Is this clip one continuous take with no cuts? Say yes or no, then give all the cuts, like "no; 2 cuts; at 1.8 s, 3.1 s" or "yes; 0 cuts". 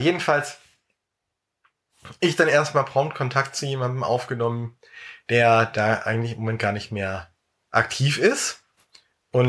yes; 0 cuts